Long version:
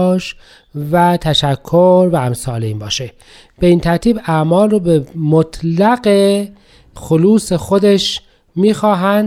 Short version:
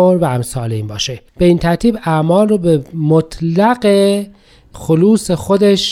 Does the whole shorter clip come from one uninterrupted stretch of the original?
no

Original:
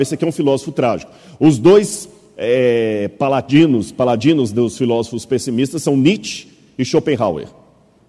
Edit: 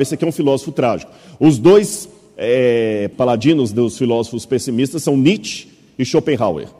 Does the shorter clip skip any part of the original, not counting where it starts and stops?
yes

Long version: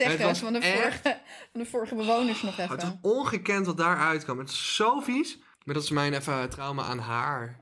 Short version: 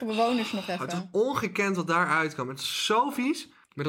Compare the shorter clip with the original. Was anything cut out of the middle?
no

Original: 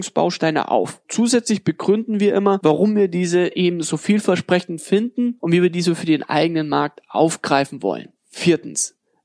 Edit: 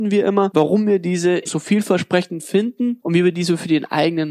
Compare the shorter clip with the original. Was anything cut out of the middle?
yes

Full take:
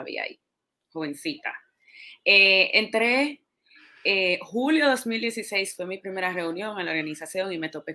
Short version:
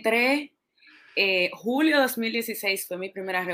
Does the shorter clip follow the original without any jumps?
yes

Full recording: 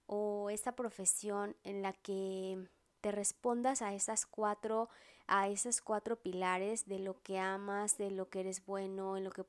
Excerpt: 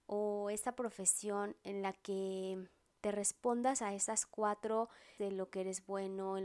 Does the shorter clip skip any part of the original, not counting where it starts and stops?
yes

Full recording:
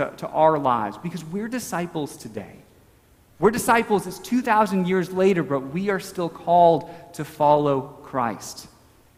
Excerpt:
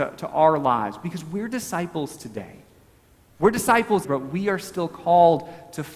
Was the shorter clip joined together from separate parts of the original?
yes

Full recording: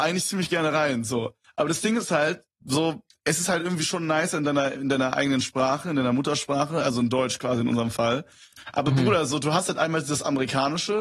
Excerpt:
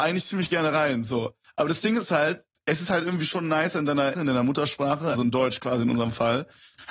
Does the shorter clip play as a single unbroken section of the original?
no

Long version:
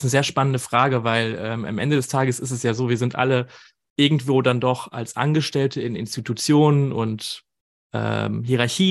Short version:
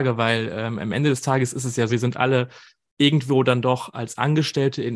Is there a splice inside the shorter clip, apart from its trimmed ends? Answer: yes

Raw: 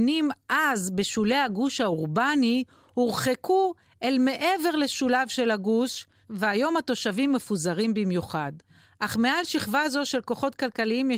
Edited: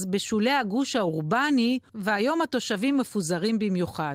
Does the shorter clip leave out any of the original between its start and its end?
yes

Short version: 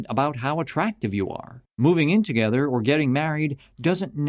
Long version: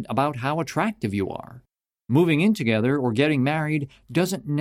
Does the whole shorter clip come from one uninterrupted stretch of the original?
no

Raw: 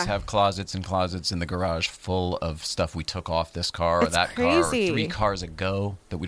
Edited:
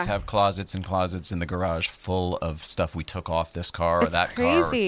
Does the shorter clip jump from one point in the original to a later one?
no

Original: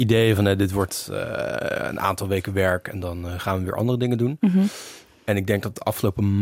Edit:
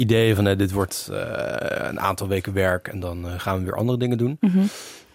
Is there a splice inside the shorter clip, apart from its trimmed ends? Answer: no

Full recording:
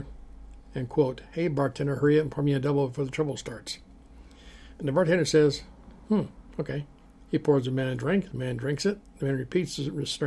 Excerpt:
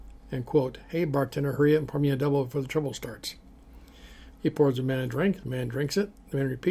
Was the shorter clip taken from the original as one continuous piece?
no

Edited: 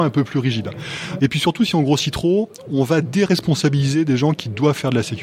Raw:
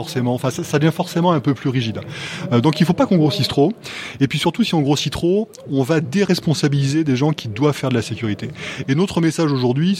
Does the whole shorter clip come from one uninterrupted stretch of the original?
no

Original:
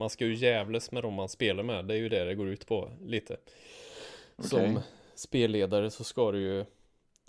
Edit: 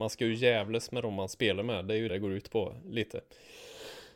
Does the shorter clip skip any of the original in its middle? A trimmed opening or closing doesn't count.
yes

